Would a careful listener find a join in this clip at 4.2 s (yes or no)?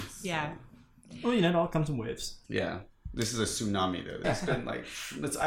yes